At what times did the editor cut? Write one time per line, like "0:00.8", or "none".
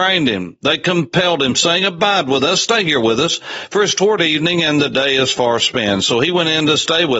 none